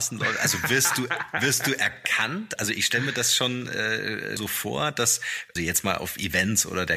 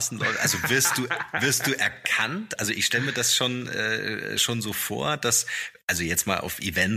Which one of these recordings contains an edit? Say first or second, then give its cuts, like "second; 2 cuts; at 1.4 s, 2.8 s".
first; 2 cuts; at 4.4 s, 5.6 s